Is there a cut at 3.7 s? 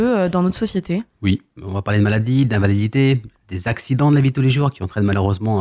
no; 1 cut; at 1.6 s

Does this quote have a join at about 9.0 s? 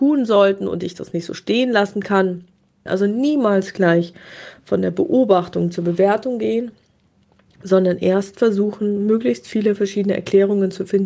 no; 1 cut; at 2.9 s

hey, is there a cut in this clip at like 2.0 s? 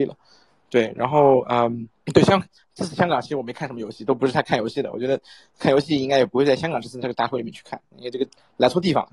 yes; 1 cut; at 2.0 s

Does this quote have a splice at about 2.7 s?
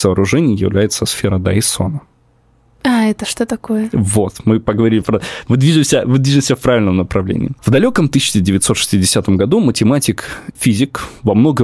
no; 3 cuts; at 5.0 s, 7.6 s, 10.6 s

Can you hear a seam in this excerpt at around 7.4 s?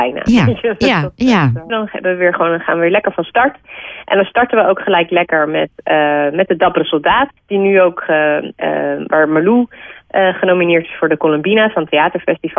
yes; 2 cuts; at 1.7 s, 7.4 s

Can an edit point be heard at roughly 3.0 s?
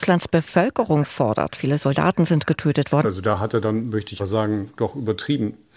yes; 2 cuts; at 3.0 s, 4.2 s

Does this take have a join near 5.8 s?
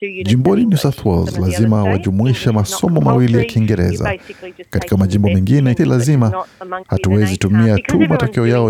yes; 2 cuts; at 5.8 s, 6.8 s

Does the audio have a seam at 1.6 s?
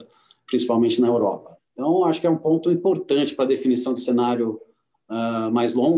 yes; 1 cut; at 1.6 s

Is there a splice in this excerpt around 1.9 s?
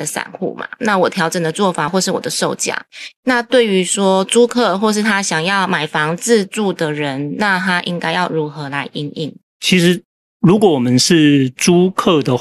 yes; 1 cut; at 1.9 s

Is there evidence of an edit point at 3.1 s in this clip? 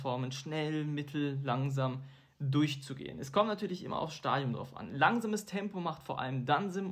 no; 0 cuts

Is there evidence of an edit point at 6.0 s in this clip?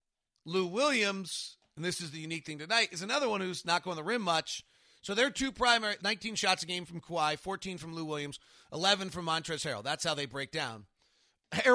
yes; 1 cut; at 6.0 s

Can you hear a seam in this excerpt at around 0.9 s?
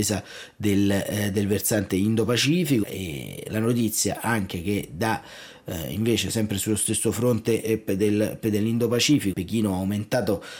no; 2 cuts; at 2.8 s, 9.3 s

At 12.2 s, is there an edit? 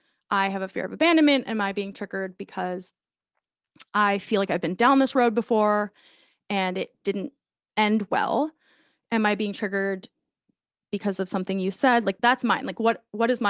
yes; 1 cut; at 12.2 s

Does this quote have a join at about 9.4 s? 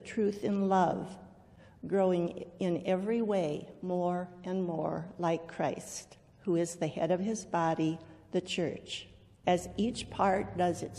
yes; 1 cut; at 9.4 s

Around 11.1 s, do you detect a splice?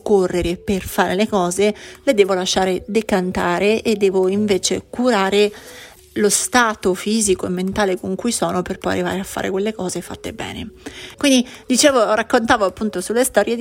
yes; 1 cut; at 11.1 s

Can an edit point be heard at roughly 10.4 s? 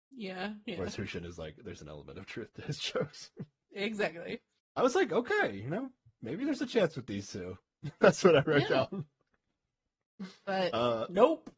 no; 1 cut; at 1.8 s

